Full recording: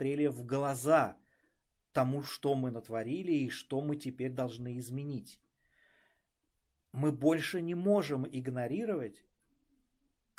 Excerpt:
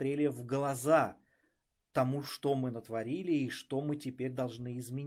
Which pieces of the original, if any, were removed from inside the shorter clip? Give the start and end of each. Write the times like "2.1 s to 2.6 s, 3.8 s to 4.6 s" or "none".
none